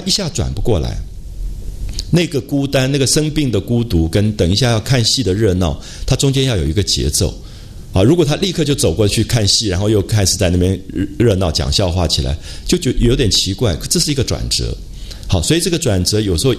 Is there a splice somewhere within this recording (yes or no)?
no